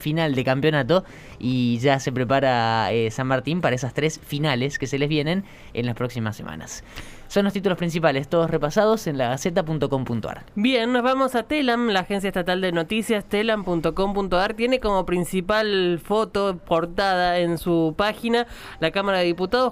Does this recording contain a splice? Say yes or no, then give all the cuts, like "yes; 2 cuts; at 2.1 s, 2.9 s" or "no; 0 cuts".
no; 0 cuts